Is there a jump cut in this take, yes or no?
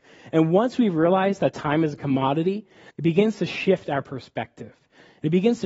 yes